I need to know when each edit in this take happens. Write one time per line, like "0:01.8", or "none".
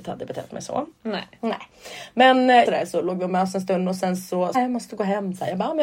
0:02.7
0:04.5